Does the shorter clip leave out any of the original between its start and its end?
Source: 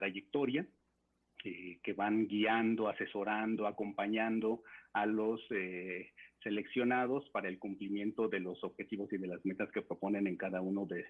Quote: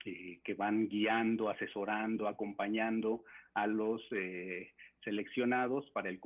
no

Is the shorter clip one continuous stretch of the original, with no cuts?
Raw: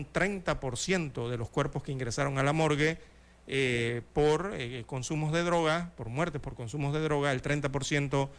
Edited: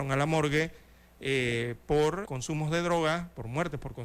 no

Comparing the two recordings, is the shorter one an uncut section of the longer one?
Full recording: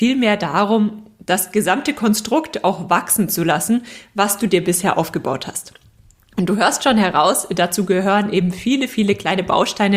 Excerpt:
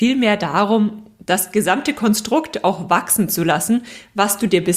yes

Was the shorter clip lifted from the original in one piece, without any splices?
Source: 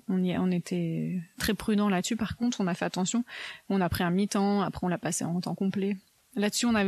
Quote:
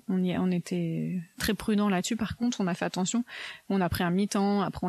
yes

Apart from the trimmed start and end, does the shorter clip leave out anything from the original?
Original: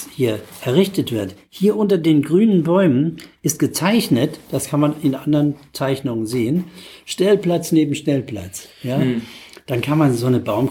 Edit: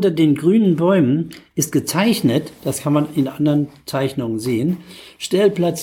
no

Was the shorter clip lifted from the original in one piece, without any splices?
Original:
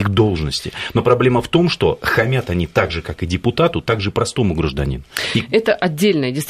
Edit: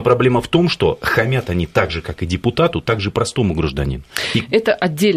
yes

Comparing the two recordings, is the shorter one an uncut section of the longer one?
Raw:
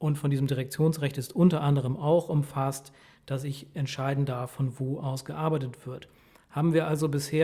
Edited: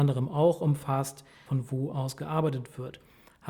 no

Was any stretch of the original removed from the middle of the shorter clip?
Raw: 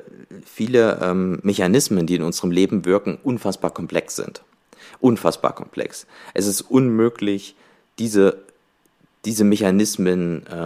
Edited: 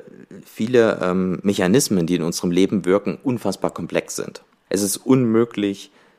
yes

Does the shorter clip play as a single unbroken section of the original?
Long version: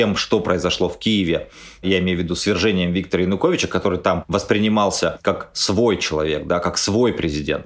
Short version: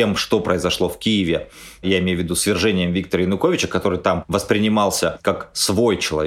yes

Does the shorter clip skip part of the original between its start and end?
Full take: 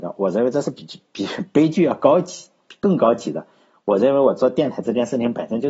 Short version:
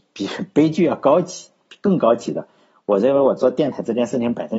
no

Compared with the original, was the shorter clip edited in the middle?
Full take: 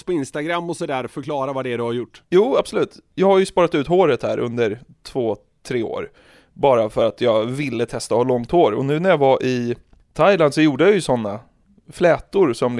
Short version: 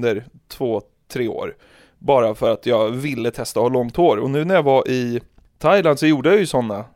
no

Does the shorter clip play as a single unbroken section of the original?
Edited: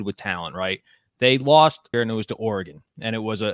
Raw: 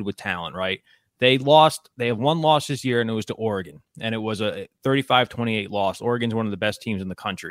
no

